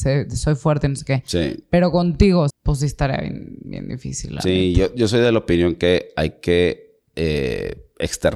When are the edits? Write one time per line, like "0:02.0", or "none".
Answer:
0:02.5

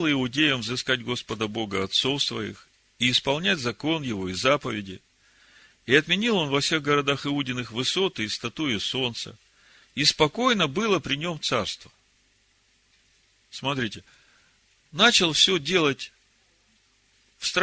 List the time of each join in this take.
none

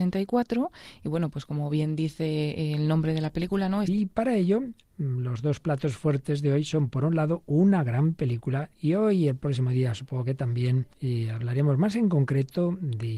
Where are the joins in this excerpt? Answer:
0:03.8
0:08.7
0:10.9

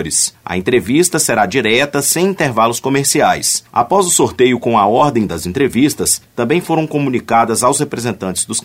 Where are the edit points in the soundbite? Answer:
0:03.7

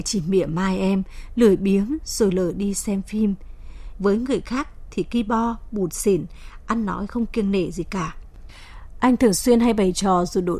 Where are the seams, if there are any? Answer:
0:04.0

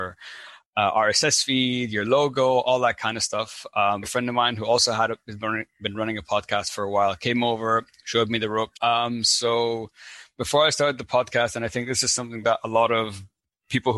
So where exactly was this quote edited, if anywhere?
0:04.0
0:08.7

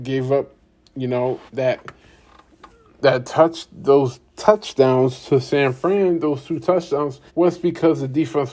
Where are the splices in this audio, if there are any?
0:01.5
0:04.3
0:07.3

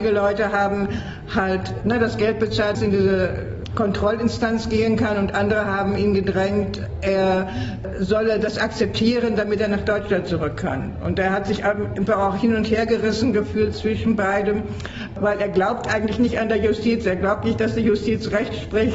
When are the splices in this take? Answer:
0:02.7

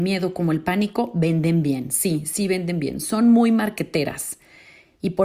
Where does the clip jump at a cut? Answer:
none

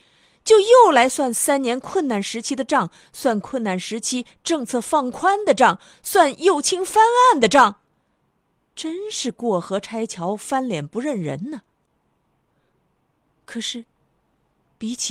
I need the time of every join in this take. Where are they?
none

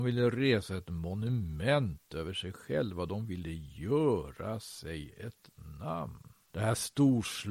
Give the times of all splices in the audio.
0:06.5

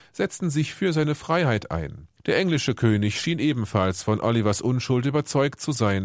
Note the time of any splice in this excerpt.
none

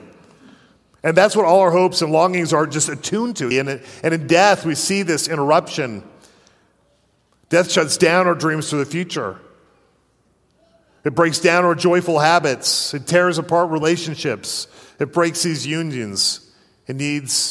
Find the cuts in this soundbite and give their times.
0:03.5

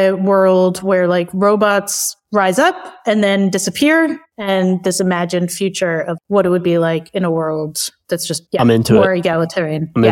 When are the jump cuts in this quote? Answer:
0:06.2

